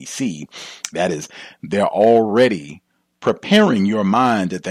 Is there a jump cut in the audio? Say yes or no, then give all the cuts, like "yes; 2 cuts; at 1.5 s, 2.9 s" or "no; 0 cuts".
yes; 1 cut; at 0.9 s